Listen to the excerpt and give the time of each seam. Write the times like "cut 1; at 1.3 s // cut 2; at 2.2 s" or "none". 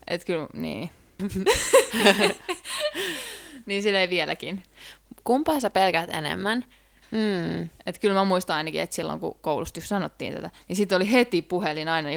cut 1; at 1.2 s // cut 2; at 7.0 s